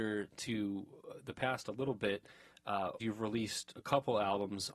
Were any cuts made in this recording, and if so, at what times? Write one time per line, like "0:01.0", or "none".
0:03.0